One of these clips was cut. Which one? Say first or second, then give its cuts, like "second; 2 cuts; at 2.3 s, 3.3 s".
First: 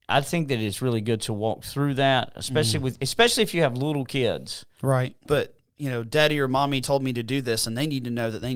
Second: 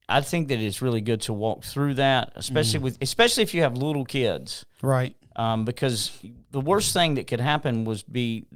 first; 2 cuts; at 5.2 s, 6.8 s